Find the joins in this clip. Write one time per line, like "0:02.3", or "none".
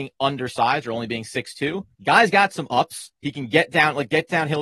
0:01.9